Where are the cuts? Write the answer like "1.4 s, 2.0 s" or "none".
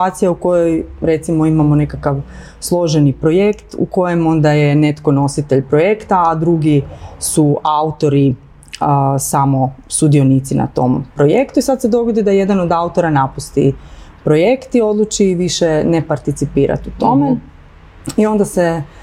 none